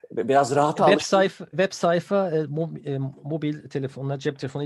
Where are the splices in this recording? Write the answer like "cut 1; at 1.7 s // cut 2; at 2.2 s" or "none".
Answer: cut 1; at 1.5 s